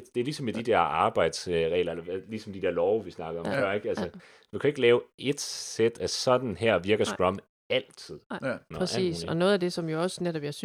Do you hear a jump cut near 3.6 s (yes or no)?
no